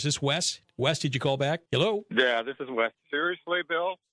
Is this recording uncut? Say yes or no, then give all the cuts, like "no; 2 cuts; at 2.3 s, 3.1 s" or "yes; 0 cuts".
no; 2 cuts; at 1.7 s, 2.9 s